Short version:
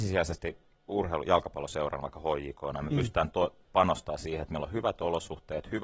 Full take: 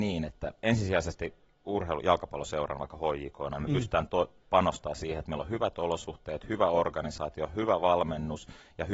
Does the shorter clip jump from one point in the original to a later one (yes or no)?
no